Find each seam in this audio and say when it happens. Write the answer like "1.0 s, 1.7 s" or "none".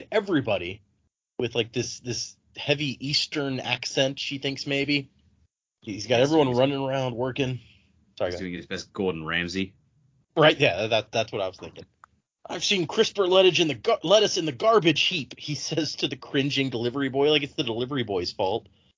none